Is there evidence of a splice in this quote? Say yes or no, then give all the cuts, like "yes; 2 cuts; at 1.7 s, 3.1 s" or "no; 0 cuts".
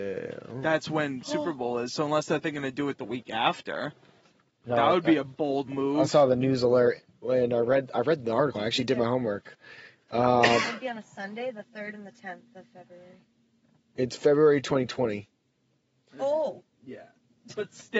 no; 0 cuts